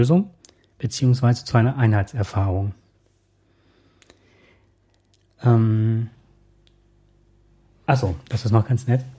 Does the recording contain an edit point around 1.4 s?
no; 0 cuts

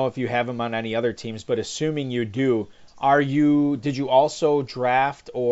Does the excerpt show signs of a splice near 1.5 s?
no; 0 cuts

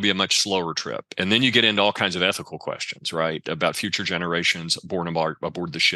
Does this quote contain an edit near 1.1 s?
no; 0 cuts

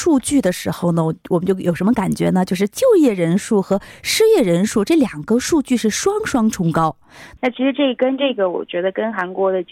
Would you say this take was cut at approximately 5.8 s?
no; 1 cut; at 7.4 s

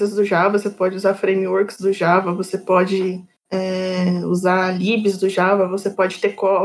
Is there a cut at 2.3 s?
no; 0 cuts

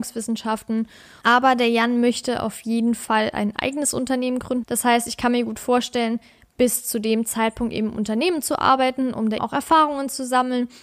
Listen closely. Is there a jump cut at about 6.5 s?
no; 3 cuts; at 1.2 s, 4.6 s, 9.4 s

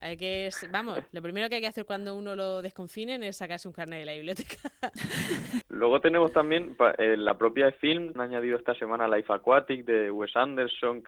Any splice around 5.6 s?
yes; 2 cuts; at 5.6 s, 8.2 s

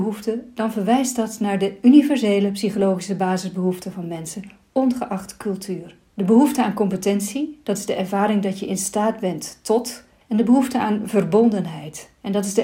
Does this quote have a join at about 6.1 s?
yes; 1 cut; at 6.1 s

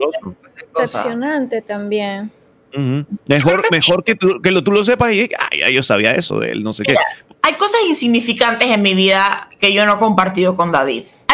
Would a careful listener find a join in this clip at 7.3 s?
yes; 1 cut; at 7.3 s

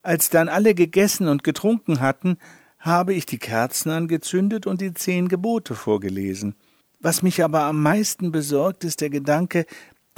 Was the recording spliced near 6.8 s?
yes; 1 cut; at 6.8 s

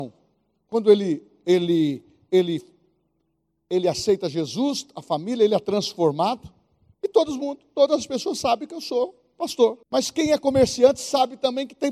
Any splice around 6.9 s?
yes; 2 cuts; at 6.9 s, 9.8 s

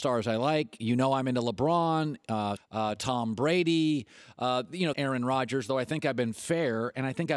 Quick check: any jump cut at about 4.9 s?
yes; 2 cuts; at 2.6 s, 4.9 s

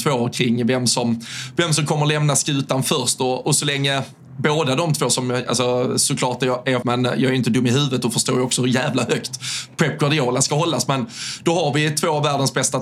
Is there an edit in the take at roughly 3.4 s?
no; 1 cut; at 6.8 s

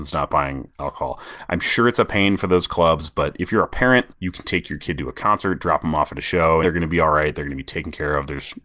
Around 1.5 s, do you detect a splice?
yes; 3 cuts; at 1.5 s, 4.1 s, 6.6 s

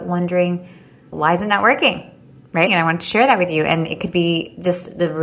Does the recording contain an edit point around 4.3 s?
no; 2 cuts; at 1.1 s, 2.7 s

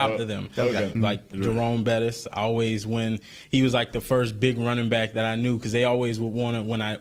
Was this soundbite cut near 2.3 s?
no; 1 cut; at 1.0 s

